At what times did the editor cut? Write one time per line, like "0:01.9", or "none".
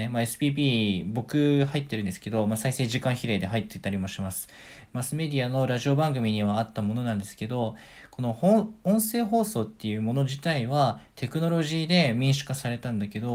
0:04.9